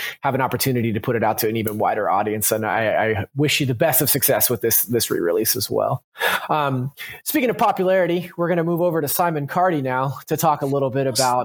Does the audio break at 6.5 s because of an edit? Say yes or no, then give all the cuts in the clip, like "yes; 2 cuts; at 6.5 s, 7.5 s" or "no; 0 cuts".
no; 0 cuts